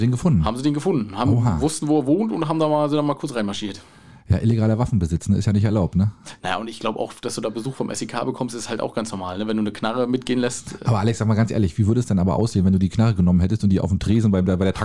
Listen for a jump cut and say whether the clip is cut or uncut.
uncut